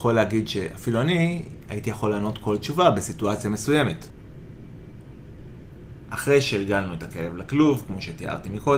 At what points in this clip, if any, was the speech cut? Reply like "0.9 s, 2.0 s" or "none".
none